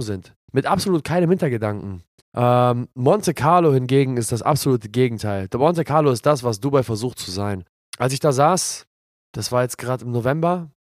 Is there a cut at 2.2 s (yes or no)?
yes